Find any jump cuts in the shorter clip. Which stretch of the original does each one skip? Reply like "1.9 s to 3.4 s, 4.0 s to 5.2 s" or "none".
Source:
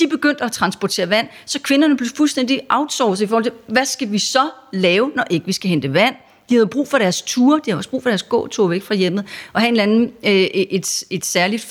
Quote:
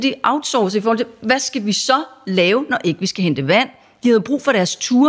none